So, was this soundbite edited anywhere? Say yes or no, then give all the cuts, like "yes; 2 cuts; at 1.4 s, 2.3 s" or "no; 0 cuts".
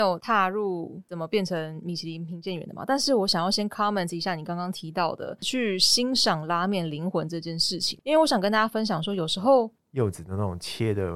yes; 1 cut; at 9.8 s